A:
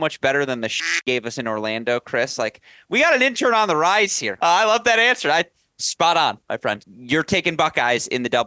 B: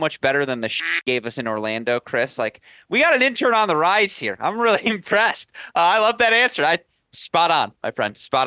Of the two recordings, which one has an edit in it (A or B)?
A